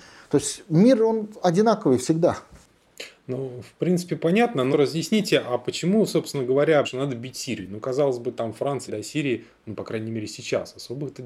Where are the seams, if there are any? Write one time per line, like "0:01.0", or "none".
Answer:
0:04.7
0:06.8
0:08.9

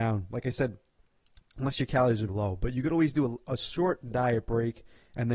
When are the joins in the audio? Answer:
0:02.3
0:03.5

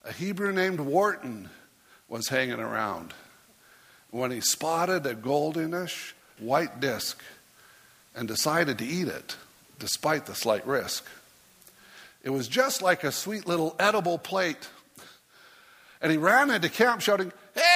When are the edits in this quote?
0:06.4

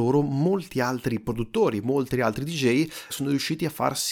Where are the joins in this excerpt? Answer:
0:03.1

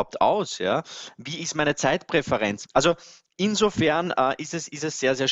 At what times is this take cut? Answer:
0:02.7

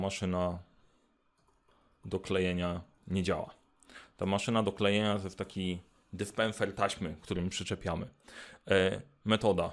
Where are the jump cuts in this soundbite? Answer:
0:07.2

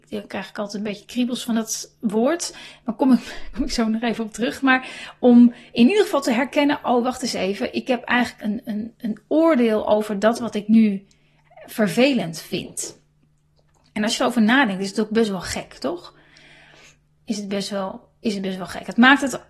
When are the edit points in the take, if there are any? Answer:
0:08.4

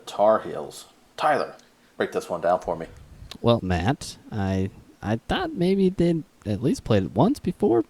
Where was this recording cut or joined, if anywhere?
0:03.6

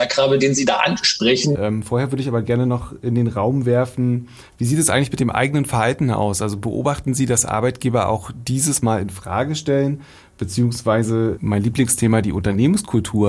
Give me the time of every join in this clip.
0:01.5
0:11.4

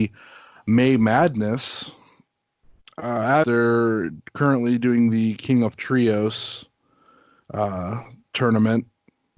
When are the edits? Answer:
0:03.4

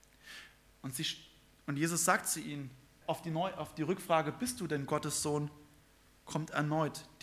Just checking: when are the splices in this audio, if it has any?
0:03.0

